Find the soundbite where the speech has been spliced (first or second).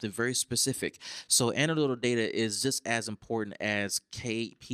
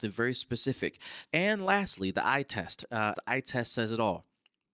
second